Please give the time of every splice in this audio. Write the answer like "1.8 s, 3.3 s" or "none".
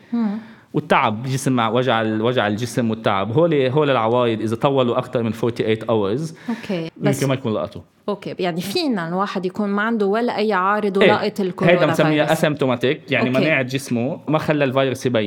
6.9 s